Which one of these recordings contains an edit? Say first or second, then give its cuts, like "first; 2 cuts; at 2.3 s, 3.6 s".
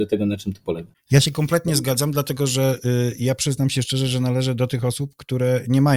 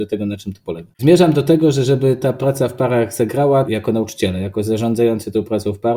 second; 2 cuts; at 1.0 s, 3.6 s